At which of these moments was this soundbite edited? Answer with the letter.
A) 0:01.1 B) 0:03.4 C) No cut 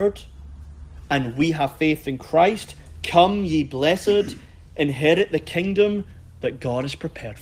C